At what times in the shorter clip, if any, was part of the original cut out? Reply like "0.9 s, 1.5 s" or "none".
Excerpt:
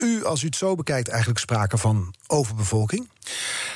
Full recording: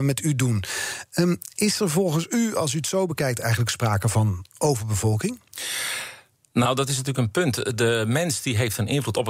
none